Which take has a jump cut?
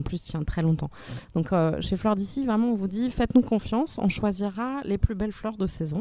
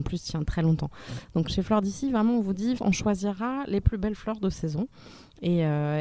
second; 2 cuts; at 1.5 s, 2.8 s

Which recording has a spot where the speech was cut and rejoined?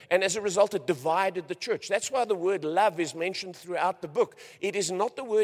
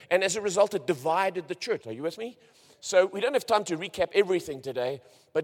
second; 1 cut; at 1.8 s

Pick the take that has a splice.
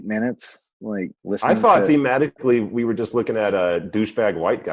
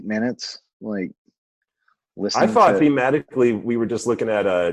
first; 1 cut; at 1.2 s

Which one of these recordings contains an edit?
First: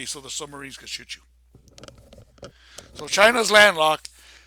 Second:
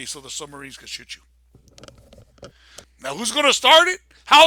second; 1 cut; at 2.8 s

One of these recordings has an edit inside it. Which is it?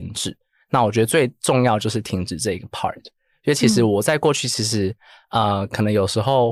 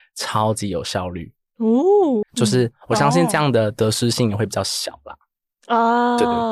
second; 1 cut; at 2.2 s

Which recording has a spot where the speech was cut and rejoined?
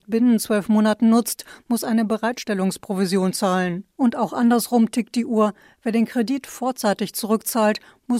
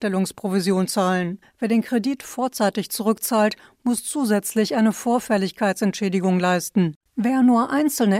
second; 2 cuts; at 1.4 s, 7.0 s

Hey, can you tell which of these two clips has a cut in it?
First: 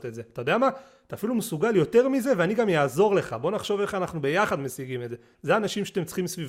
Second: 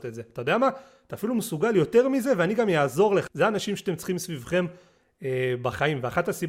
second; 1 cut; at 3.3 s

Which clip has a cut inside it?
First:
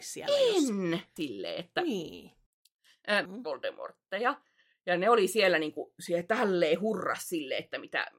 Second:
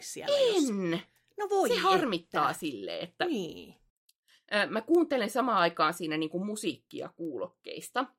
first; 2 cuts; at 1.2 s, 3.3 s

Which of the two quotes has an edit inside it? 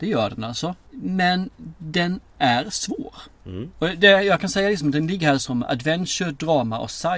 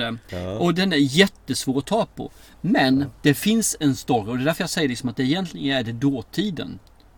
first; 1 cut; at 3.7 s

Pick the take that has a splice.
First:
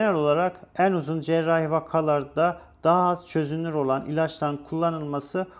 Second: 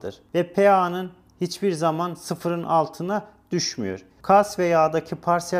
second; 1 cut; at 4.2 s

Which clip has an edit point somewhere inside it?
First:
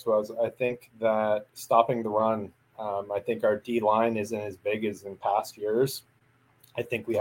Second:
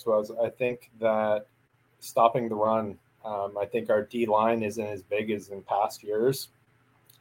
first; 1 cut; at 1.5 s

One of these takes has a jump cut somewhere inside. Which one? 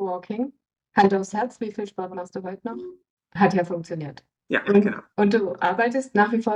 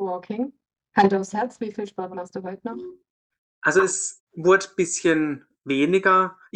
first; 1 cut; at 3.2 s

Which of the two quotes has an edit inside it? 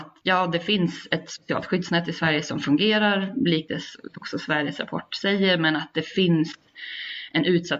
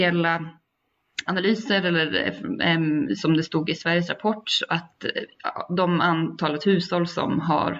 second; 1 cut; at 1.3 s

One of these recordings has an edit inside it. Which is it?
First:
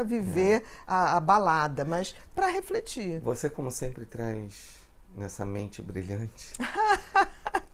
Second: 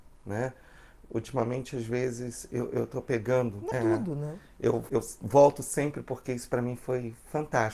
second; 2 cuts; at 3.7 s, 4.9 s

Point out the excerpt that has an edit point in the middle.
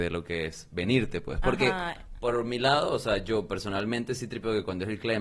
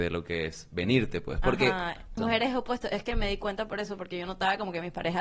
second; 1 cut; at 2.2 s

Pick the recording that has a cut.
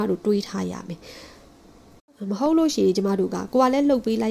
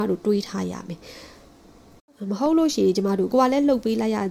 second; 1 cut; at 3.3 s

